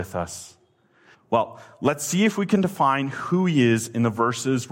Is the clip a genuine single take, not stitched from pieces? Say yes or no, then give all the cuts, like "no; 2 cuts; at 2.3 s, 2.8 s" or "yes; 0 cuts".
no; 1 cut; at 1.1 s